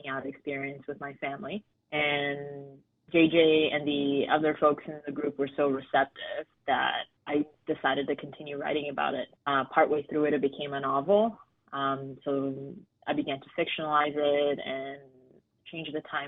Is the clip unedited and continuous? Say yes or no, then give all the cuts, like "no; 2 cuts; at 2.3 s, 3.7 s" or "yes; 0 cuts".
yes; 0 cuts